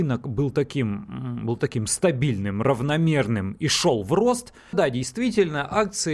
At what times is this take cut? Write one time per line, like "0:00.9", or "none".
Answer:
0:04.7